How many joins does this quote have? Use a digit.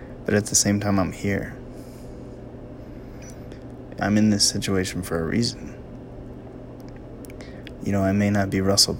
2